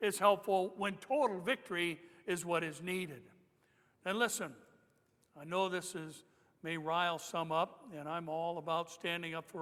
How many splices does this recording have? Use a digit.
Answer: 0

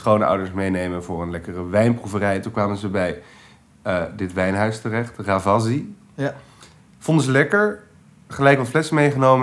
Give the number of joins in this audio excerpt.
0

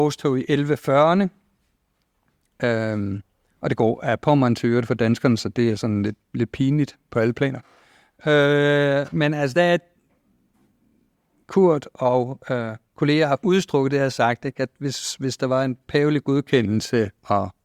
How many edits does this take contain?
0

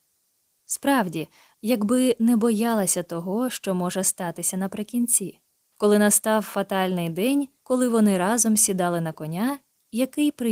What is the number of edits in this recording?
3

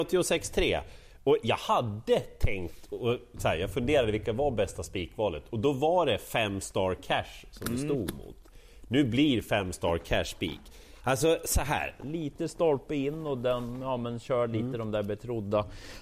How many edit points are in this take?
1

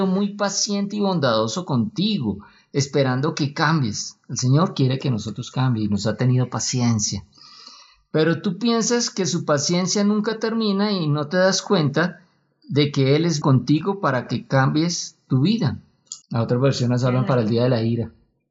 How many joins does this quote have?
2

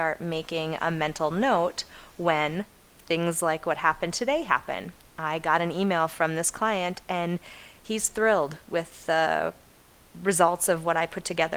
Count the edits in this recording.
0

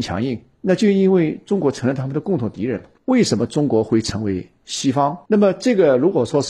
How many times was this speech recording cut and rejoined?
2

